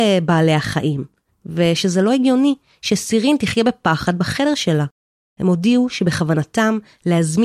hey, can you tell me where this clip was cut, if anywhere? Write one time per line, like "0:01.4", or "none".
none